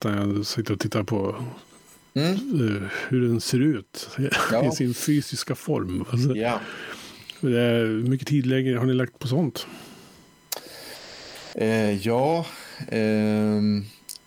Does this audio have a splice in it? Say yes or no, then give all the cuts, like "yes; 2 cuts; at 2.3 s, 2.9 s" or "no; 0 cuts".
no; 0 cuts